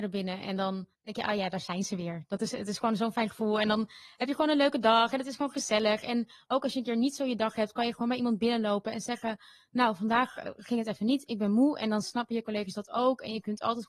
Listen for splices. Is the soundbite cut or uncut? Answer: cut